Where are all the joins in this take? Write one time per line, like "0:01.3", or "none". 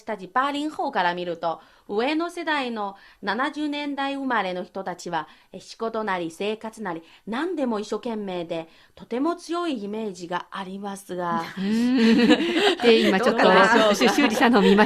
none